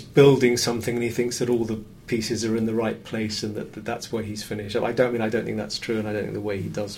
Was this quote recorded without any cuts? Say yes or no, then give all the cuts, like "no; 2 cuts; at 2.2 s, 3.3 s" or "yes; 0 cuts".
yes; 0 cuts